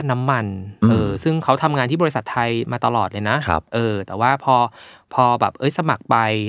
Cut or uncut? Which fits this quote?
uncut